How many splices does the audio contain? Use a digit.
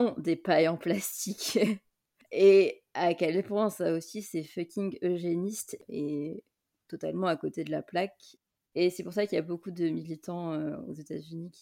1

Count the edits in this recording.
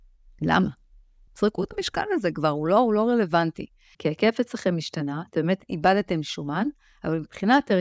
2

